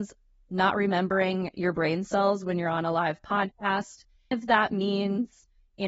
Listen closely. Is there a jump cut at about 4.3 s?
yes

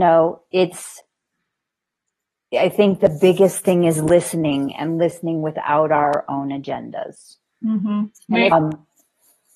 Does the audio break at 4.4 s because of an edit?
no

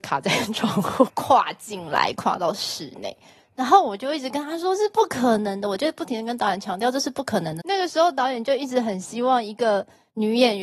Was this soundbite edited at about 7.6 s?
yes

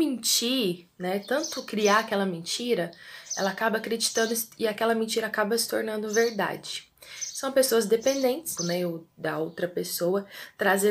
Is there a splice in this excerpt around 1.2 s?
no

